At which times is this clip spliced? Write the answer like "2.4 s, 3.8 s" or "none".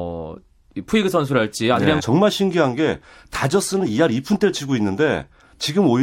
2.0 s